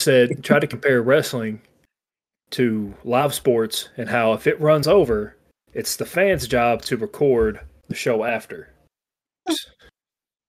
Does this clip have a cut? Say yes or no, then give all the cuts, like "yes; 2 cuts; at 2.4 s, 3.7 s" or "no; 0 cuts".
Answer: yes; 1 cut; at 9.5 s